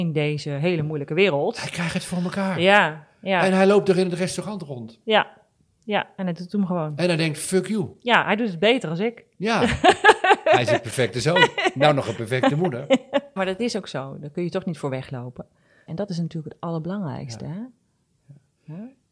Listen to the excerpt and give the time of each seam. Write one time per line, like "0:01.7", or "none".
0:13.4
0:15.9